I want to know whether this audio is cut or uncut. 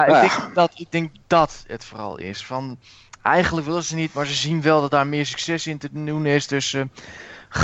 uncut